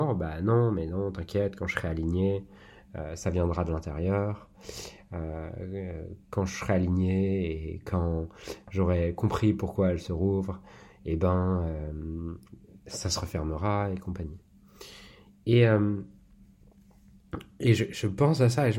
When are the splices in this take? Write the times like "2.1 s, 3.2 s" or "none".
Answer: none